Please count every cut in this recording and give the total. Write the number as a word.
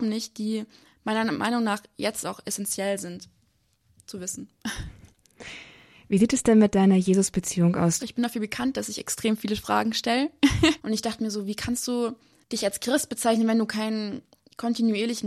two